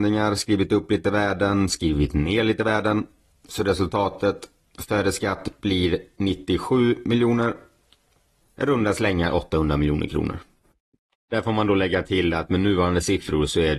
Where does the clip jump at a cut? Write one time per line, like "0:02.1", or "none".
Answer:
0:08.4